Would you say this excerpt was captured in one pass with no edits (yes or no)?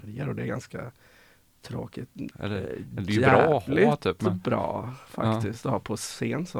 no